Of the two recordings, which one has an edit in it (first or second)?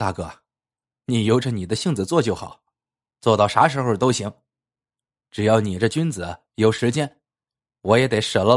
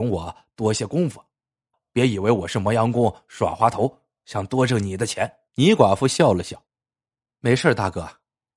second